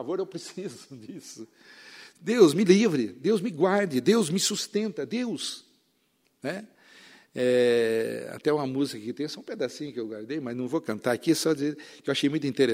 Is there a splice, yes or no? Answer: no